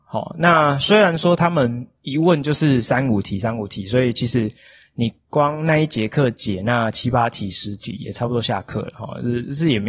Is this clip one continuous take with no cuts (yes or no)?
yes